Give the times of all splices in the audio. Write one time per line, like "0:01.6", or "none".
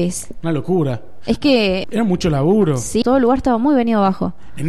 0:01.8
0:03.0